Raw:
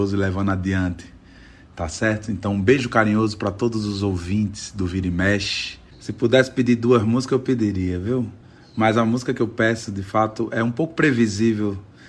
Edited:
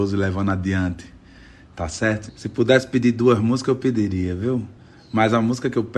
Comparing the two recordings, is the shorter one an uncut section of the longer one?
no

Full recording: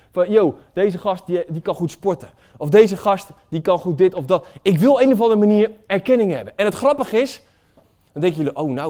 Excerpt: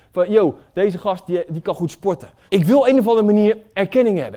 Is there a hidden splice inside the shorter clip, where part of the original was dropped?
yes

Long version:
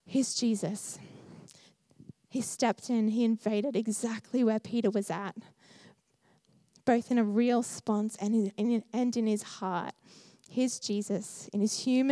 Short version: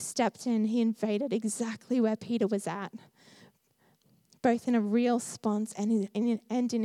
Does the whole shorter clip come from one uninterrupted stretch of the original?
yes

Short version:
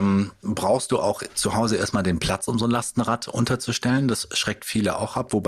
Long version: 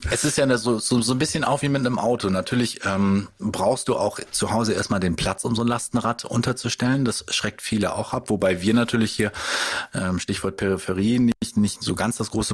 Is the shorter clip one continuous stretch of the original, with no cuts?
yes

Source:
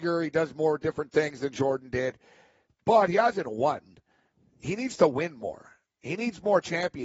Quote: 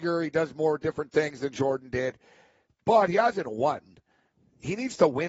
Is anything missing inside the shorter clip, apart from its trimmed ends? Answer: no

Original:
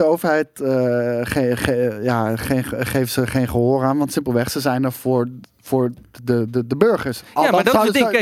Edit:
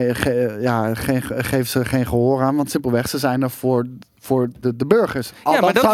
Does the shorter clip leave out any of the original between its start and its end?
yes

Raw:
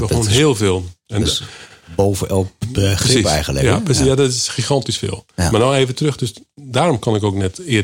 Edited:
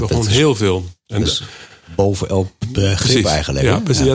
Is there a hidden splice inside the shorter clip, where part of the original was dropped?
no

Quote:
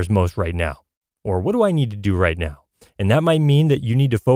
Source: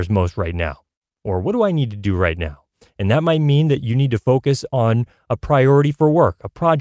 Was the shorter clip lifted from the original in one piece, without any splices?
yes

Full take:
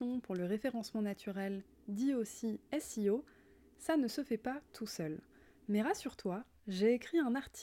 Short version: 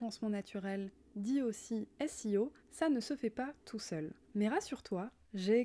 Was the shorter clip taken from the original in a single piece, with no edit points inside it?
no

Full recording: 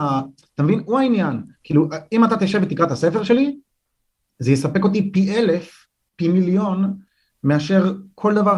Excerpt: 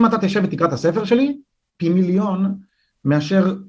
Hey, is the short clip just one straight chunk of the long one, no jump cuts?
no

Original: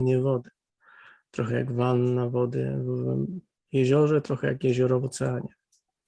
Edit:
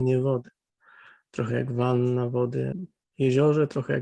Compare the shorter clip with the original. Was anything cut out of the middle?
yes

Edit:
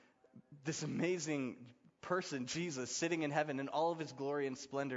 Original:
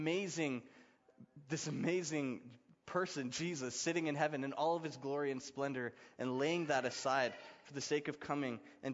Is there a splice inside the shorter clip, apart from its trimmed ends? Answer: no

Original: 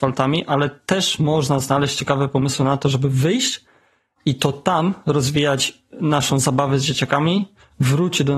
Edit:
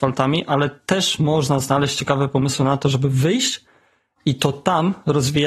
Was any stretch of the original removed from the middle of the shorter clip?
no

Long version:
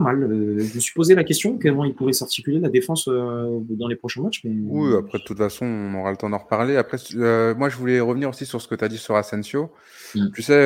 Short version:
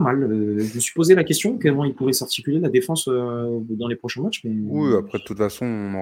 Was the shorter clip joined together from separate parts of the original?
no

